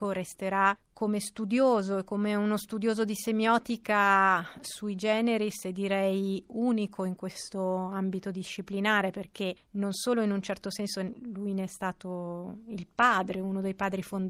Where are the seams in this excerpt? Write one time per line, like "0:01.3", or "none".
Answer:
none